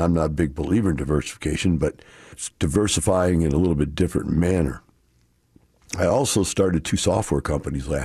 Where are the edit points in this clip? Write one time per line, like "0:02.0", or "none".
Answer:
0:02.3